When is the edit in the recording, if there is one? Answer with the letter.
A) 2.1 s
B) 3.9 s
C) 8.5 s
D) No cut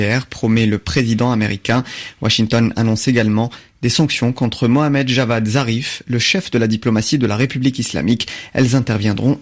D